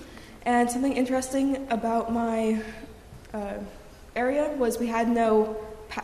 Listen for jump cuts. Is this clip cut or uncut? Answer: uncut